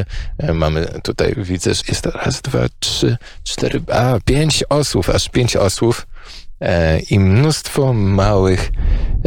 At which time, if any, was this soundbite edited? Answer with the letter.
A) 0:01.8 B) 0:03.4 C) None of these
A